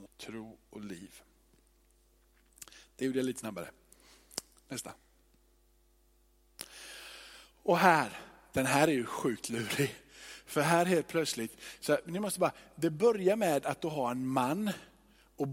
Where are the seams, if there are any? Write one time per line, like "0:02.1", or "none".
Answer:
none